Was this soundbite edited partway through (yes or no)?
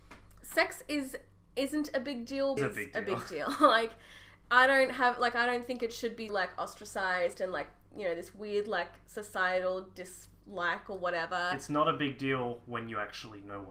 yes